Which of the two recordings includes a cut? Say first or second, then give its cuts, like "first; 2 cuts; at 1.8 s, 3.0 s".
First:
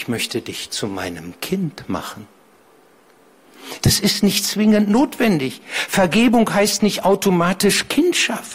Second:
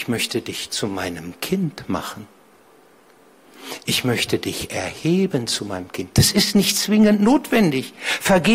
first; 1 cut; at 3.8 s